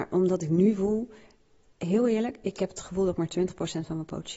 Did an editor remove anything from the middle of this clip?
no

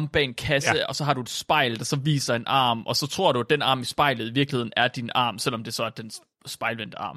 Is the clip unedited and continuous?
yes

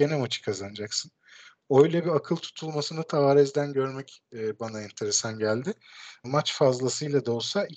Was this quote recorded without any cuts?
no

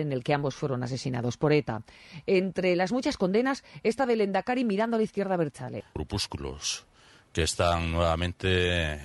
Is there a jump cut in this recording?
no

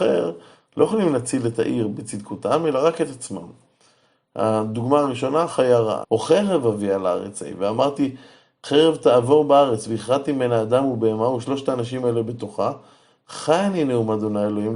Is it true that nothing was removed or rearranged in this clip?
no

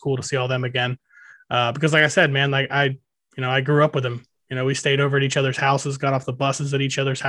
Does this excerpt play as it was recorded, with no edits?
yes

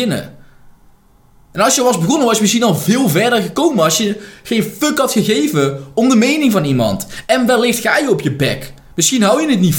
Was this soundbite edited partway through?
no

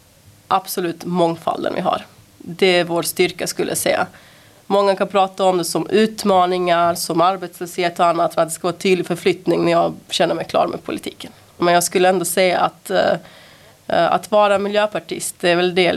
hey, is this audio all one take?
no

